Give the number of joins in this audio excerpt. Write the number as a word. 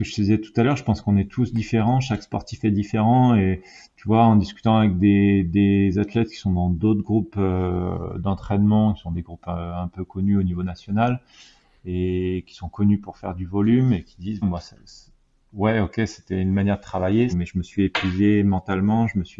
two